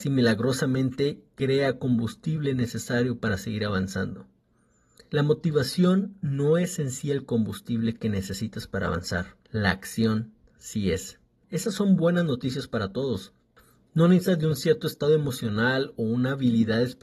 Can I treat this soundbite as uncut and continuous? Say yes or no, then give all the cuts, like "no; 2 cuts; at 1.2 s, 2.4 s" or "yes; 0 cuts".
no; 2 cuts; at 5.1 s, 9.4 s